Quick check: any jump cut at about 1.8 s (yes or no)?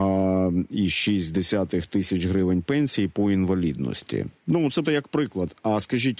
no